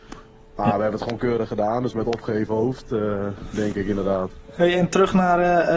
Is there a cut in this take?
no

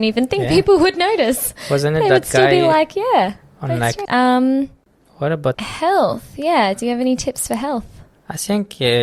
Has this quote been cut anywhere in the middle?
yes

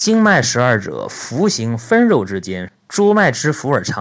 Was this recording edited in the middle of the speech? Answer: yes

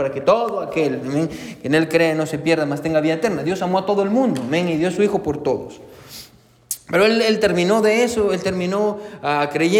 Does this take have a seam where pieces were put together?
no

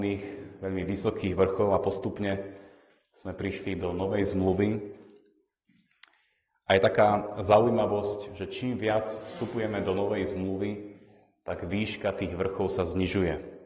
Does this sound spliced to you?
no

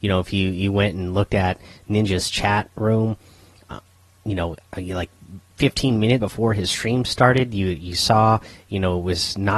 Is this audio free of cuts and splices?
no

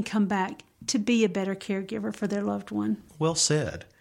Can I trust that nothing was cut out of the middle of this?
yes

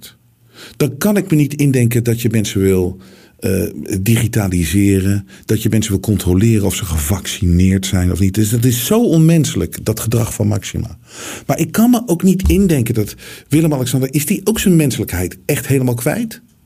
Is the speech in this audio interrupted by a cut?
no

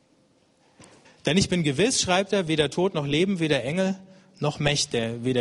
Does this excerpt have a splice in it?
yes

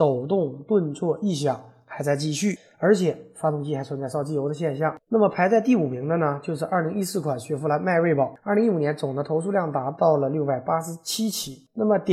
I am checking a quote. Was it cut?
no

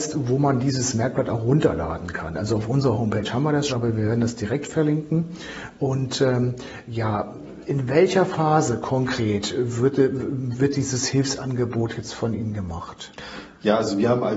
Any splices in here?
yes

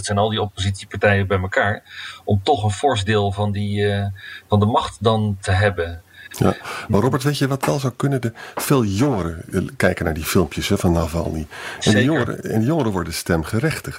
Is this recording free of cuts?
yes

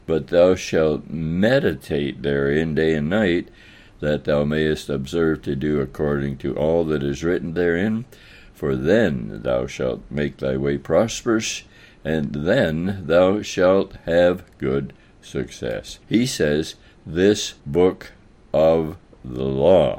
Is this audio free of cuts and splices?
no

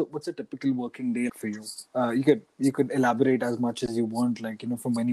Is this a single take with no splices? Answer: no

